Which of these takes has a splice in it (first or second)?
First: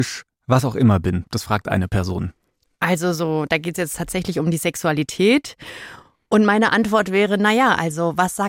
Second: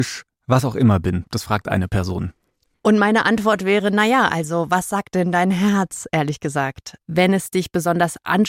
second